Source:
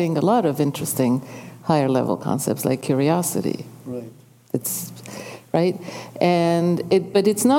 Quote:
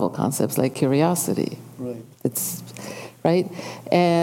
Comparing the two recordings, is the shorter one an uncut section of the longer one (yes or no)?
no